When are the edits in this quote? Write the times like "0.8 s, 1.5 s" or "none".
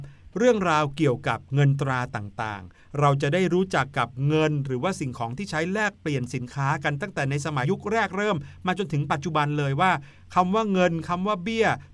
7.6 s